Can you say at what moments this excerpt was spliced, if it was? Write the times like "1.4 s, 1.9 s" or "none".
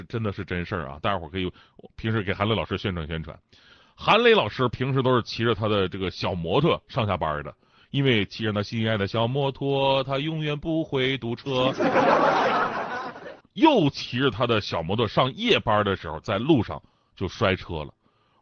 13.4 s, 16.2 s